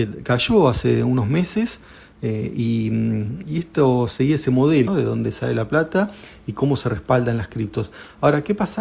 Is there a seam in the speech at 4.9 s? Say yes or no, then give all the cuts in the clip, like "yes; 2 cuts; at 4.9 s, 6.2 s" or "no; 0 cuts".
yes; 2 cuts; at 3.4 s, 4.9 s